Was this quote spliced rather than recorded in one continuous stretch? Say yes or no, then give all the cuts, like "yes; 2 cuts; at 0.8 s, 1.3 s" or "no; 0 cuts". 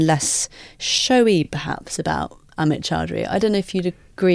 no; 0 cuts